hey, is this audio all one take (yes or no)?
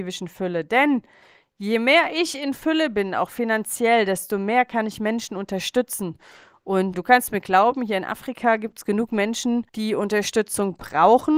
no